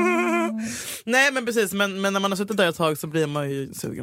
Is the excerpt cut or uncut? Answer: uncut